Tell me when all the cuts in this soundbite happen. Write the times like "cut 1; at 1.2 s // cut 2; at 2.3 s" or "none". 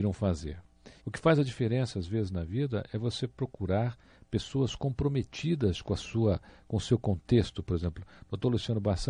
cut 1; at 1.0 s